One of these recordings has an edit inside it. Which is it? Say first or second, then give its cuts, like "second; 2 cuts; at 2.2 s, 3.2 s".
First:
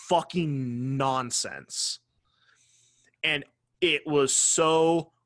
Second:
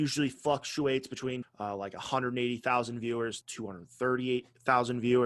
second; 2 cuts; at 1.4 s, 3.4 s